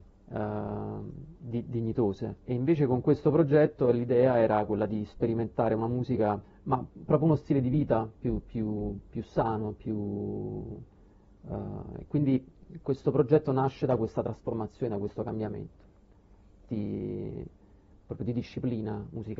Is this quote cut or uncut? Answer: uncut